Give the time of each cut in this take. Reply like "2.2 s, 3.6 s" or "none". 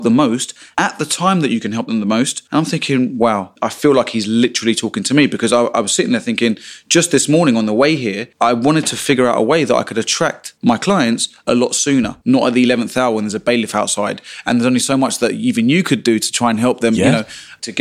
3.6 s